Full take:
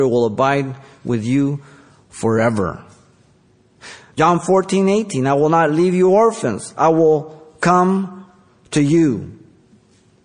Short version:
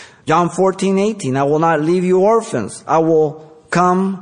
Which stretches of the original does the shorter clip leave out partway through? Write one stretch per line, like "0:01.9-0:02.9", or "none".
none